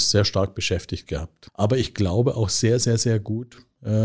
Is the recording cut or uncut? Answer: cut